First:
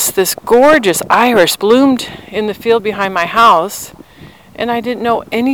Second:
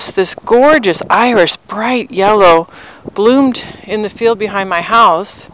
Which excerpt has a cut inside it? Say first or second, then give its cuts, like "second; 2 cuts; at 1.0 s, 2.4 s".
first; 1 cut; at 1.6 s